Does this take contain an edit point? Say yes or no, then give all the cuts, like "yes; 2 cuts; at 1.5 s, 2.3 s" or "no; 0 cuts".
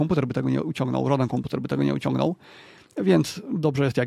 no; 0 cuts